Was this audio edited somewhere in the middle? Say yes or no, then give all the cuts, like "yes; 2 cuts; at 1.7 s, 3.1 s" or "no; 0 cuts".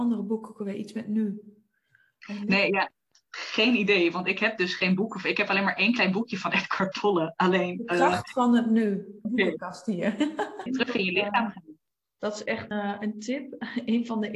yes; 3 cuts; at 9.2 s, 10.7 s, 12.7 s